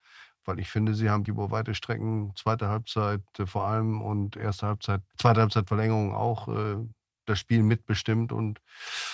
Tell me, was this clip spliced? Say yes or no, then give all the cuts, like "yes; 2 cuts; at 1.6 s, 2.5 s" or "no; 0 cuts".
yes; 2 cuts; at 1.3 s, 5.1 s